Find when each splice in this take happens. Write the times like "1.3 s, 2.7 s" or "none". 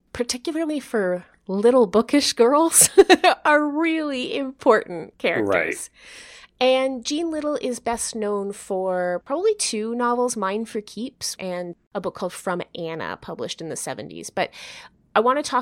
11.4 s